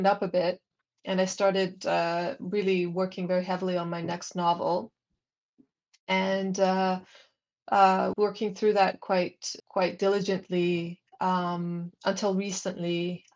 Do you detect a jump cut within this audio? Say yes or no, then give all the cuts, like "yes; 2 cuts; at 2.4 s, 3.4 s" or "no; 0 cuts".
yes; 2 cuts; at 8.1 s, 9.6 s